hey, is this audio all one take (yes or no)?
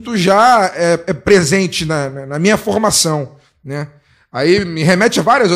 yes